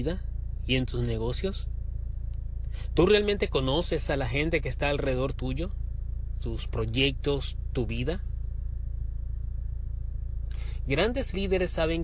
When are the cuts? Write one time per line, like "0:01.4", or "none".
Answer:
0:06.4